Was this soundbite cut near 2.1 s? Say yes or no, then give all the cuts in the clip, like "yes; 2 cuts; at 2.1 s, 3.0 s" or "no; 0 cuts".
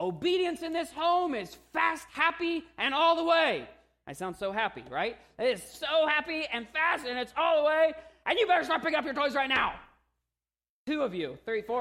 no; 1 cut; at 10.7 s